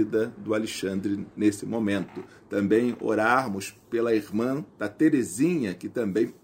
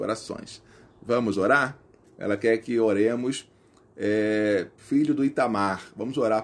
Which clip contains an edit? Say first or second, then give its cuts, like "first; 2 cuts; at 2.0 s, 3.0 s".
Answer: second; 2 cuts; at 2.0 s, 4.8 s